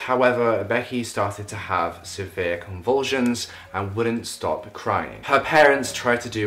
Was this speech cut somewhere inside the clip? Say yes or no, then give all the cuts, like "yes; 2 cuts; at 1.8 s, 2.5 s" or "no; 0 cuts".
no; 0 cuts